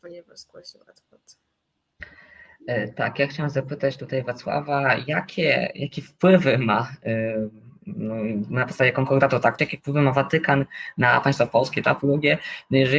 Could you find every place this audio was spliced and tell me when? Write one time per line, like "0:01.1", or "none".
0:09.6
0:11.8